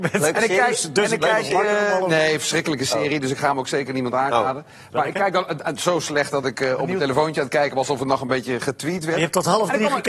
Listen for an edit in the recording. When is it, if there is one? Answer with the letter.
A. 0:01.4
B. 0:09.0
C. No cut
C